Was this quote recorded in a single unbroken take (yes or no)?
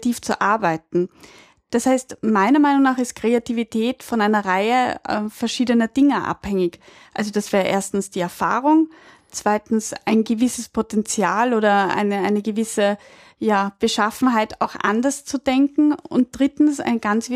yes